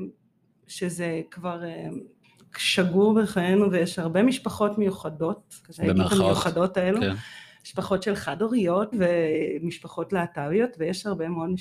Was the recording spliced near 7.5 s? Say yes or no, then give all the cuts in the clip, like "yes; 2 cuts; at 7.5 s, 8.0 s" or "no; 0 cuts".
no; 2 cuts; at 5.6 s, 8.9 s